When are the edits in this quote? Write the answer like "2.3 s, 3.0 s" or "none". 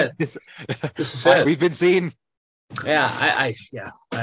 1.4 s